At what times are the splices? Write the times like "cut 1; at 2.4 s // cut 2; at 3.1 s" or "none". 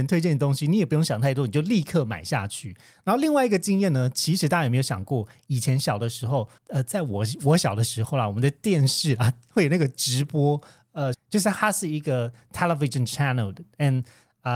cut 1; at 6.6 s // cut 2; at 11.1 s